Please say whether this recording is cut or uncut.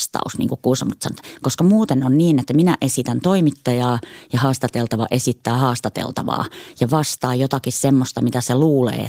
cut